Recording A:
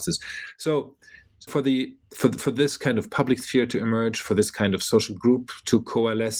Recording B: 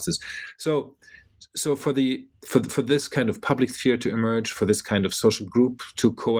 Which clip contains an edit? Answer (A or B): A